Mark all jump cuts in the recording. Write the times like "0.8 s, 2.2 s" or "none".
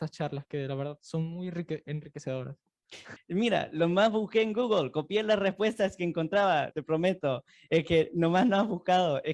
3.2 s, 6.7 s